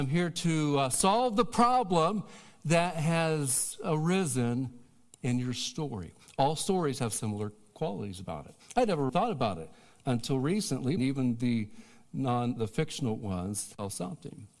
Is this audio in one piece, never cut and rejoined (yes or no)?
no